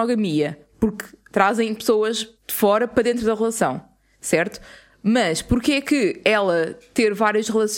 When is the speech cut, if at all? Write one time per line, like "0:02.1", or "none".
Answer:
0:02.3